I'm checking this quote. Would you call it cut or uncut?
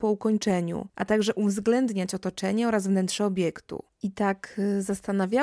cut